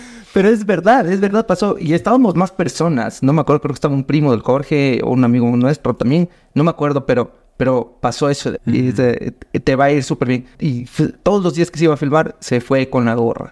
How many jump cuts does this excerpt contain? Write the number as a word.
two